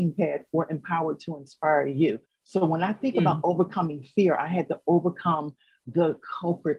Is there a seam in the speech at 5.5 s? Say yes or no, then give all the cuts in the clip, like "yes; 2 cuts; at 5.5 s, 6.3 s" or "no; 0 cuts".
no; 1 cut; at 2.3 s